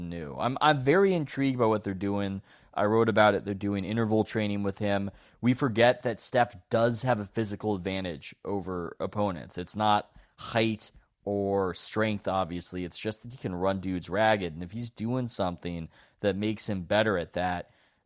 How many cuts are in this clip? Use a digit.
0